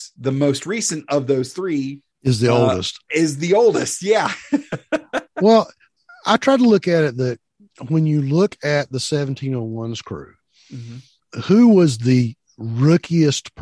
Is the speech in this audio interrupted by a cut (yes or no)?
no